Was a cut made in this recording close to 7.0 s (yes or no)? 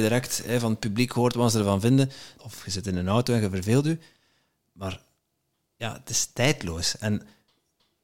no